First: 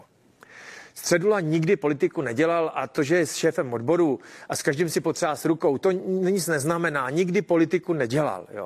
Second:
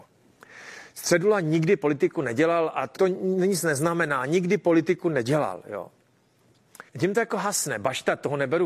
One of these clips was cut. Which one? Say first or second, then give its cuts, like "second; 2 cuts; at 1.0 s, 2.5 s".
second; 2 cuts; at 2.9 s, 6.9 s